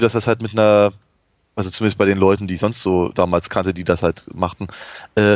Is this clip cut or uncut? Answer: uncut